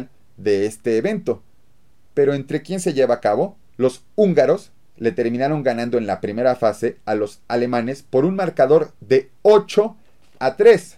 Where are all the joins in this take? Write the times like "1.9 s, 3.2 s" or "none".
3.7 s